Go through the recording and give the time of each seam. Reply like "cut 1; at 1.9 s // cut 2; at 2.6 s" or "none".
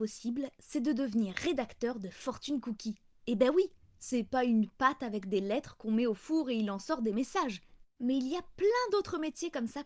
cut 1; at 7.8 s